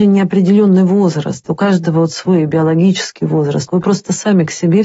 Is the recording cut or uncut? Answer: cut